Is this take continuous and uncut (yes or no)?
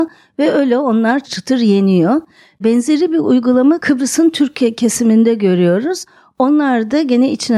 no